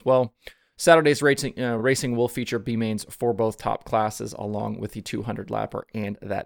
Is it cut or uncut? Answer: uncut